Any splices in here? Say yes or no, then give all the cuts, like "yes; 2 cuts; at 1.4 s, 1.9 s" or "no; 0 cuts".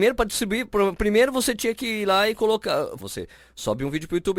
yes; 1 cut; at 3.0 s